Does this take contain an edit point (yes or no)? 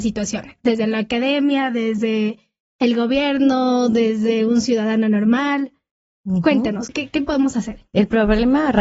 yes